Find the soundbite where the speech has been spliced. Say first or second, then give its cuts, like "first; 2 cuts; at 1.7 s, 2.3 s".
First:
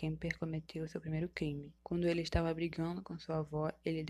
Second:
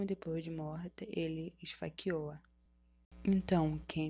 first; 1 cut; at 1.8 s